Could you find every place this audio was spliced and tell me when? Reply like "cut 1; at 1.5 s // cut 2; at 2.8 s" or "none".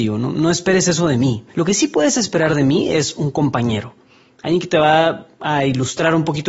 cut 1; at 1.5 s